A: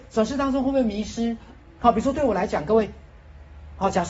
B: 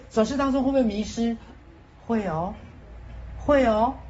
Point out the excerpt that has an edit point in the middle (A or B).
A